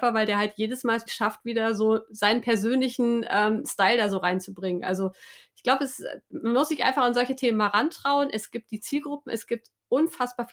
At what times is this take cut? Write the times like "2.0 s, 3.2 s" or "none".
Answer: 1.1 s